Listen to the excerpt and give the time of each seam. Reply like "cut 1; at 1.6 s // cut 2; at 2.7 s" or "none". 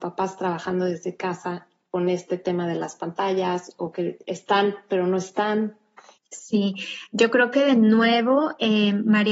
cut 1; at 6.2 s